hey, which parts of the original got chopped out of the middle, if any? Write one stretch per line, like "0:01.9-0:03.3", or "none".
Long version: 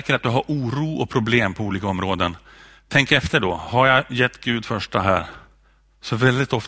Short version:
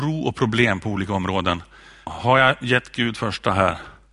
0:02.8-0:03.6